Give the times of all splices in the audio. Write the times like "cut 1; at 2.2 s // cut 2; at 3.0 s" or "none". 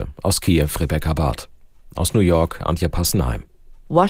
cut 1; at 1.9 s